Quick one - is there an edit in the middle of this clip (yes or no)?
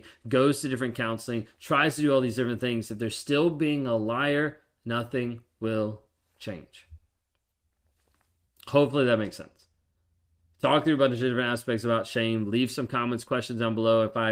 no